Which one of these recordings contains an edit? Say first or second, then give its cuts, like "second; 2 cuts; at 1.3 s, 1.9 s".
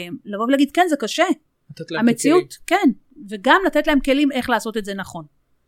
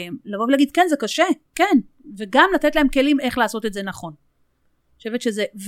second; 1 cut; at 1.5 s